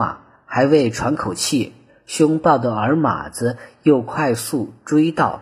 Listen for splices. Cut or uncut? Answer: uncut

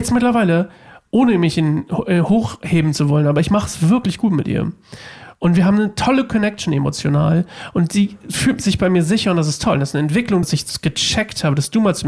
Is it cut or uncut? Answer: cut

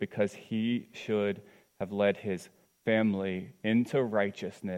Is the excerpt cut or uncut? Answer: uncut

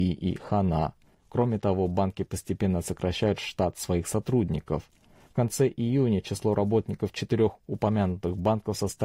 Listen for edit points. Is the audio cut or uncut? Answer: cut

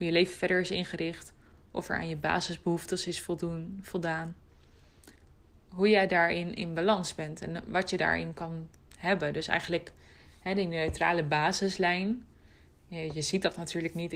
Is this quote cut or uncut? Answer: uncut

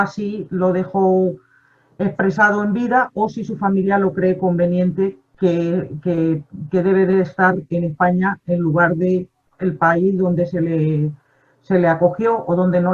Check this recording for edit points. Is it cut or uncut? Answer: uncut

